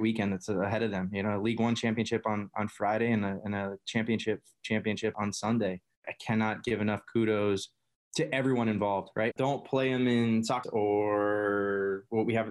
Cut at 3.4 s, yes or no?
no